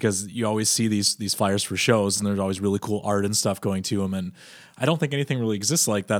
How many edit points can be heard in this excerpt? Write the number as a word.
zero